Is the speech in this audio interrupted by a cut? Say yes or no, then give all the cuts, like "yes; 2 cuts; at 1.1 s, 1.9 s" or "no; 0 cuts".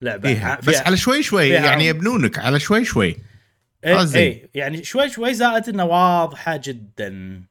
no; 0 cuts